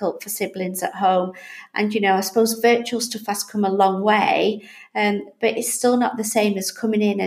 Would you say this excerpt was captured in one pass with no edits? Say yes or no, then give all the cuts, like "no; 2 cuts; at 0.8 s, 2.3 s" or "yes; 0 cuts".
yes; 0 cuts